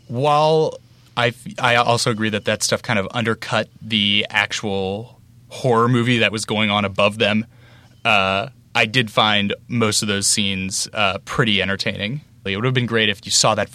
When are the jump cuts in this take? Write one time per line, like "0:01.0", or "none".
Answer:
0:12.5

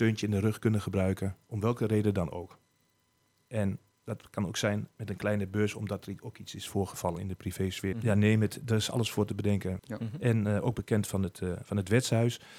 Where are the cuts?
0:07.9
0:09.8

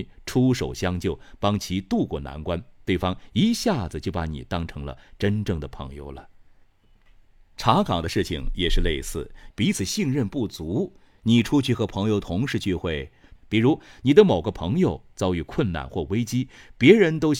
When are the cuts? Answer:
0:09.5
0:13.4

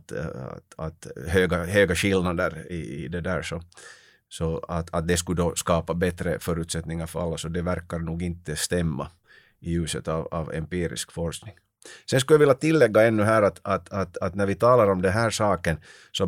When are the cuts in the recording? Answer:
none

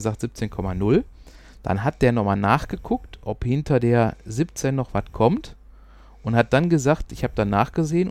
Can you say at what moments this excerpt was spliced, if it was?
none

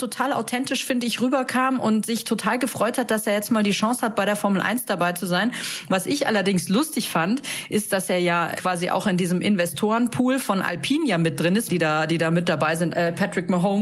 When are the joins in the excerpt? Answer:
0:08.6
0:11.7
0:12.9

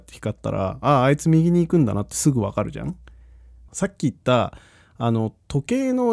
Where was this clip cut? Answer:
0:03.7

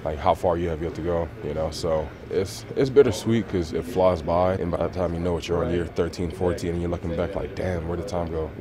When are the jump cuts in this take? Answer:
0:04.6

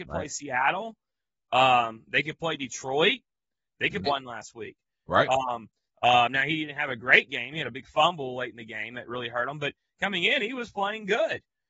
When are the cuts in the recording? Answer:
0:04.1
0:05.9

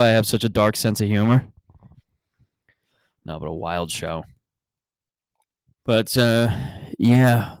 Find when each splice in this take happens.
0:05.8

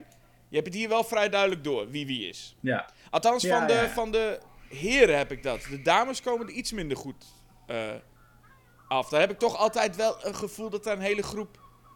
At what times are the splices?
none

